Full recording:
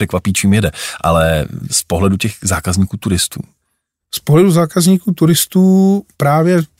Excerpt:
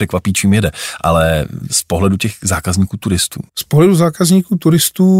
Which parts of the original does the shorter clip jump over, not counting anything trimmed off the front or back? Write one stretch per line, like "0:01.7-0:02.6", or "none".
0:03.5-0:04.0